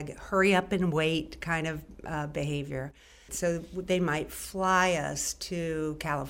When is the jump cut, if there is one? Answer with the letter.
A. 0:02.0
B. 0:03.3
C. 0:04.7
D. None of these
B